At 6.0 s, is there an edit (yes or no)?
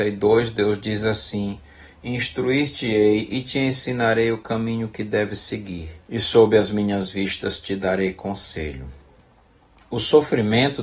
yes